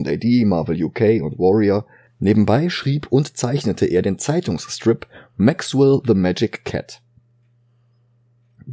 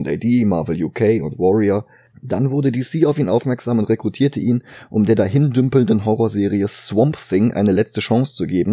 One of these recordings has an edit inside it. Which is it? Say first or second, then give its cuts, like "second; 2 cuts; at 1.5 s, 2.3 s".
second; 1 cut; at 2.1 s